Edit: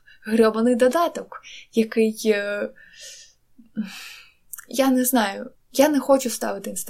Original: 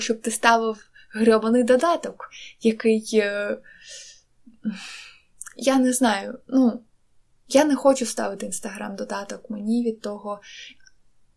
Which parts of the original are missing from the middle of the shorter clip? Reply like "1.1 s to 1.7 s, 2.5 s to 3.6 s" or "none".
6.4 s to 7.3 s